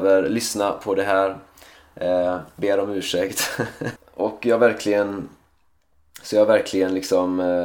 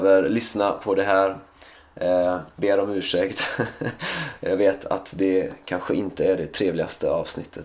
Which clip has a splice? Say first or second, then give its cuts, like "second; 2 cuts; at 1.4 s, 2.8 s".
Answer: first; 1 cut; at 4.0 s